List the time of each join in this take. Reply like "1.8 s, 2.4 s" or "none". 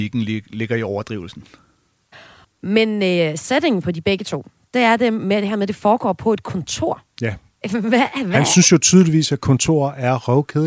2.4 s